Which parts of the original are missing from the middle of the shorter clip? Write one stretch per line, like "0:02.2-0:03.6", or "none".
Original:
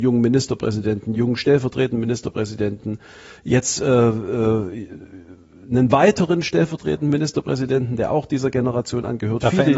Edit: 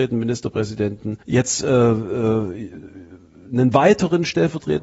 0:03.0-0:03.4

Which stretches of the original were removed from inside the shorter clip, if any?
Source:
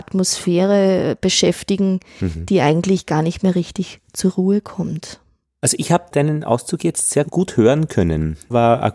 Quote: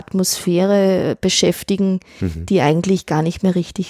none

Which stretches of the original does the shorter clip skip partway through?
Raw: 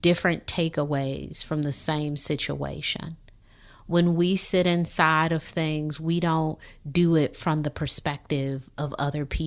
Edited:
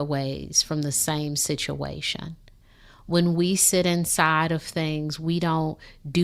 none

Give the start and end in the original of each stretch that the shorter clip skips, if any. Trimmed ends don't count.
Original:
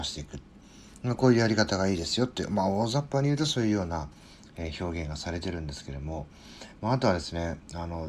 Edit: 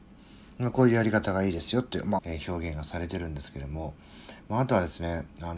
0:02.6-0:04.5

